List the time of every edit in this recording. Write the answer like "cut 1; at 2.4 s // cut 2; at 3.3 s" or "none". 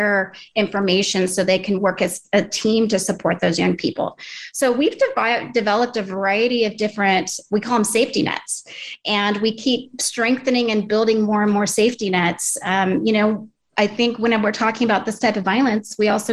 none